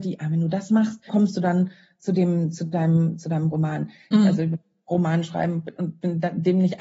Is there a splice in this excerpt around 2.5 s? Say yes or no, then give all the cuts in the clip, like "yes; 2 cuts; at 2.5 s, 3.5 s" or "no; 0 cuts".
no; 2 cuts; at 1.1 s, 4.1 s